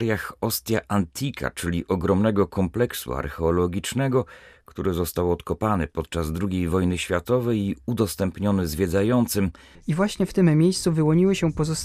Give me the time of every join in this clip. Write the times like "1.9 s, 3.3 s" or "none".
9.7 s